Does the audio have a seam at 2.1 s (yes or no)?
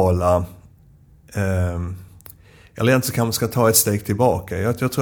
no